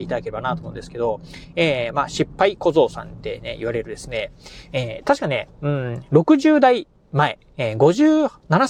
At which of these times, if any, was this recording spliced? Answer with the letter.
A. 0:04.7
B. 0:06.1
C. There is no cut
C